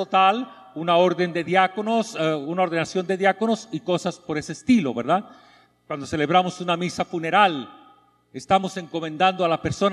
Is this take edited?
no; 0 cuts

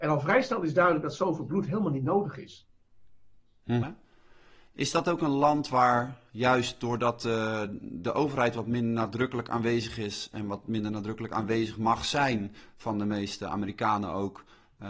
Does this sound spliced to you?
yes; 1 cut; at 3.8 s

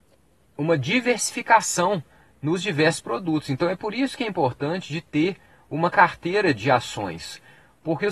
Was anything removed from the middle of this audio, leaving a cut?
no; 0 cuts

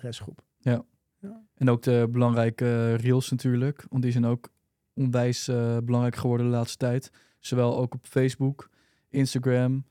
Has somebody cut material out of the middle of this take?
no; 0 cuts

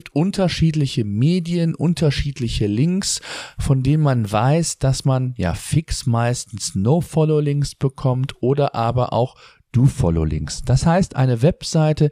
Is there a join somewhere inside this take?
no; 0 cuts

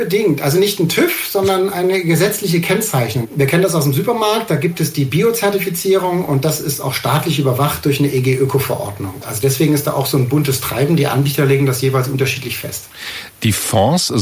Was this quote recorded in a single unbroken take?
no; 1 cut; at 9.2 s

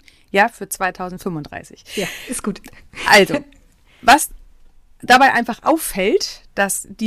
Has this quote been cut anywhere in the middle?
no; 0 cuts

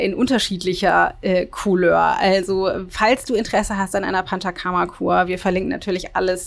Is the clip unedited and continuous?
yes; 0 cuts

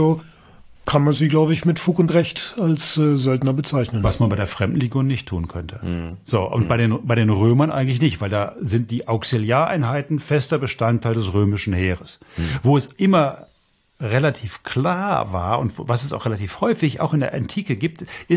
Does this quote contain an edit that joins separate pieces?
no; 0 cuts

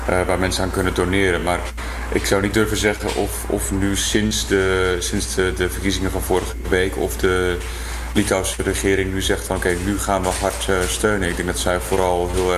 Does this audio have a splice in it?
no; 0 cuts

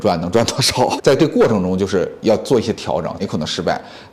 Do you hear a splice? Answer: yes; 2 cuts; at 1.0 s, 3.2 s

